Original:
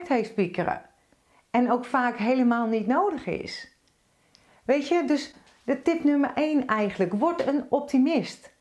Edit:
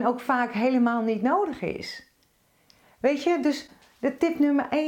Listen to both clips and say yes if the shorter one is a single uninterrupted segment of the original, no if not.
yes